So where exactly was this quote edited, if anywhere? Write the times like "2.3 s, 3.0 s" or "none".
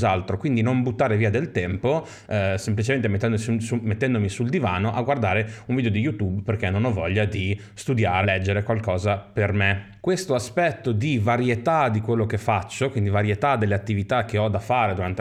8.2 s